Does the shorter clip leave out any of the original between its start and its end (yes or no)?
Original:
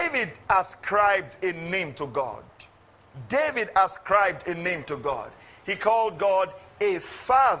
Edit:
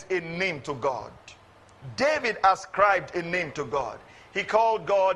no